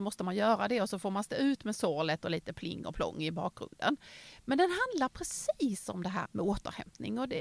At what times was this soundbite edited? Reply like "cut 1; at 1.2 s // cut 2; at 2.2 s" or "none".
cut 1; at 6.3 s